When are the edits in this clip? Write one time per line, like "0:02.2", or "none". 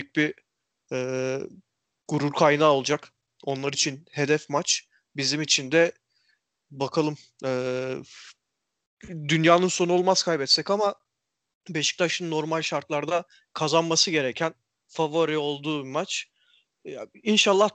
none